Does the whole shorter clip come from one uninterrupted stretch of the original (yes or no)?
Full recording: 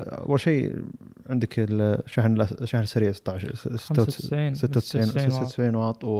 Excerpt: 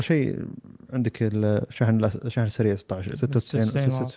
no